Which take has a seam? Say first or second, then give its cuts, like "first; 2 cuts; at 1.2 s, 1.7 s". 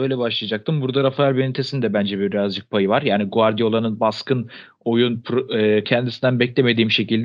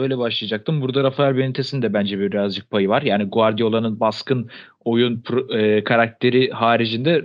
first; 1 cut; at 5.8 s